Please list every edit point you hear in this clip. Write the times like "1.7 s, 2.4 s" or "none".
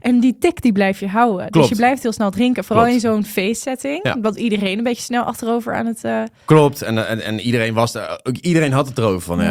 none